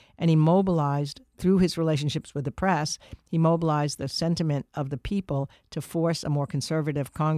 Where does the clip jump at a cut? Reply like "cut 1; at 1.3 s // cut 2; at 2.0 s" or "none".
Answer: none